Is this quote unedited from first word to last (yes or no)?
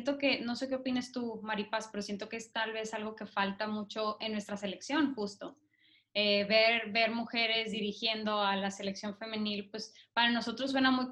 yes